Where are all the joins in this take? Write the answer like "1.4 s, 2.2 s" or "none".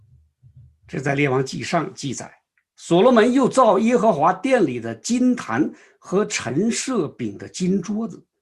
none